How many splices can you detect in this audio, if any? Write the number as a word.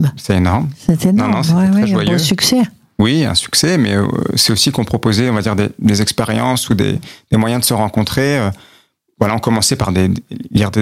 zero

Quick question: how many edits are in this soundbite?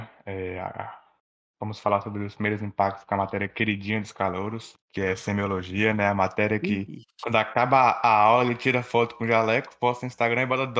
one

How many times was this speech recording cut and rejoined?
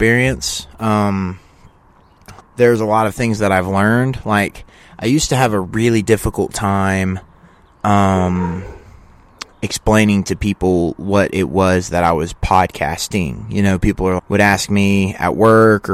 two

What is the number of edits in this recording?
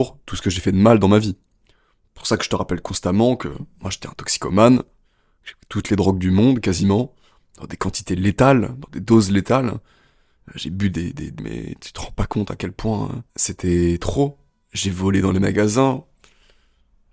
three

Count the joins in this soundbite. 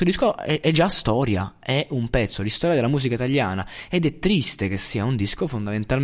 zero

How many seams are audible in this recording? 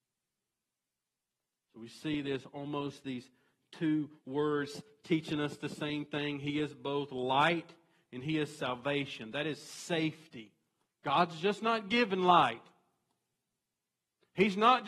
one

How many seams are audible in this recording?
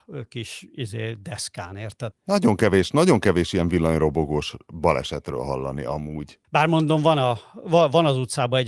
two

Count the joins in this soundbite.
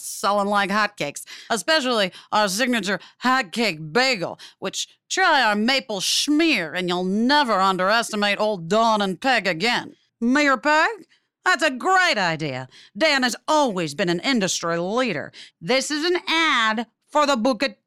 two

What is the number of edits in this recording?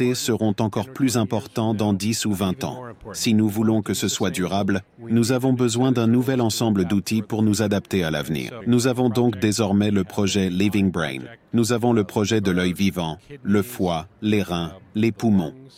one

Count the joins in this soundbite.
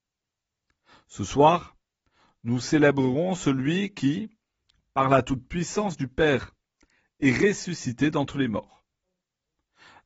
zero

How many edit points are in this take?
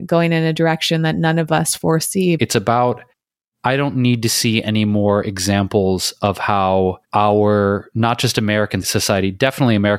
three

